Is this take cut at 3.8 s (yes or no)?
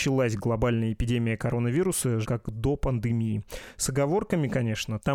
no